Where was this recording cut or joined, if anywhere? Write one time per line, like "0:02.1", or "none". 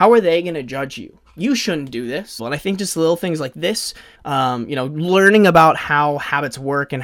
0:02.4
0:04.1

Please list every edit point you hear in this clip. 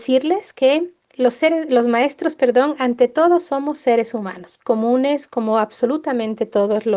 0:04.6

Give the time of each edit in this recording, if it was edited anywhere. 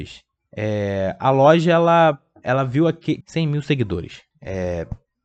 0:03.2
0:04.3

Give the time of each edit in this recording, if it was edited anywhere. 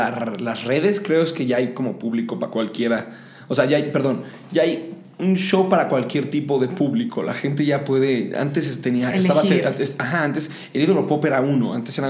none

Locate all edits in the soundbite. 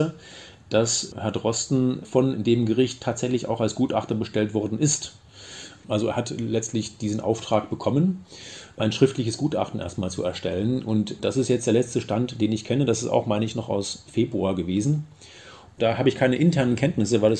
none

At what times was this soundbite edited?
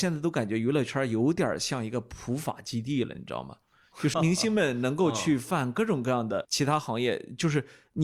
0:04.1

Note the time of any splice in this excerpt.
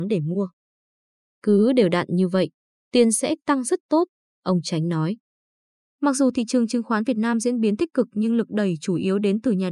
none

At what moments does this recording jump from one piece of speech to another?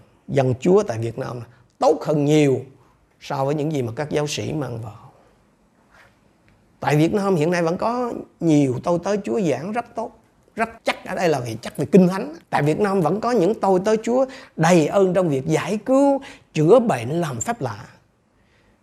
0:10.8
0:12.4

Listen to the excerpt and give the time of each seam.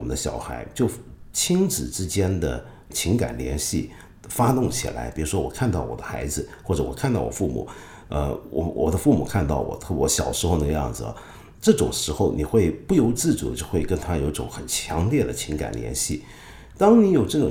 none

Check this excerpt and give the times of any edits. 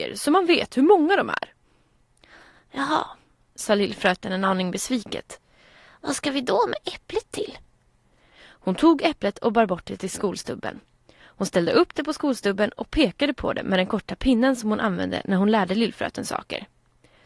0:08.3

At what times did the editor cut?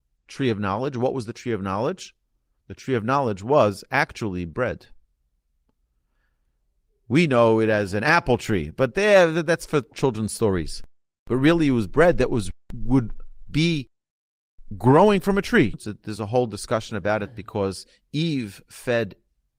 0:15.7

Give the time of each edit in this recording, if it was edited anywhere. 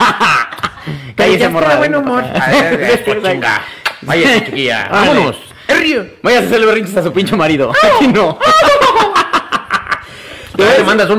none

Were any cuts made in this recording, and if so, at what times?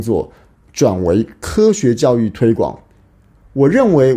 none

